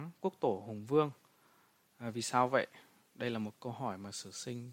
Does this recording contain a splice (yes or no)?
no